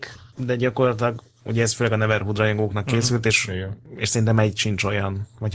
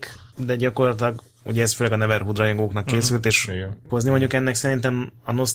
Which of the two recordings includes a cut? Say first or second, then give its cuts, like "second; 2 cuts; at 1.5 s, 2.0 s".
second; 1 cut; at 3.9 s